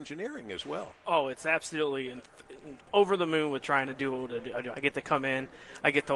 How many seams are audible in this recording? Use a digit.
2